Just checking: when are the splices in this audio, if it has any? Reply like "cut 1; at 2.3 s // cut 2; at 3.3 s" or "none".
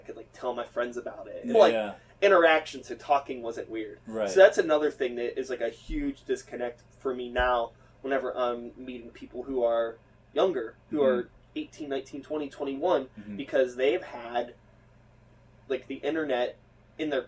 cut 1; at 1.5 s